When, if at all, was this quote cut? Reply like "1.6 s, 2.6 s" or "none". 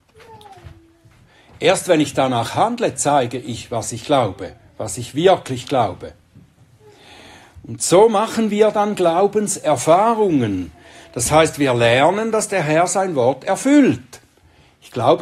none